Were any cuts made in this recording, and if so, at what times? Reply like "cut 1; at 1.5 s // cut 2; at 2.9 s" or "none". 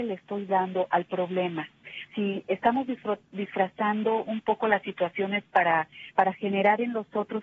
cut 1; at 2.1 s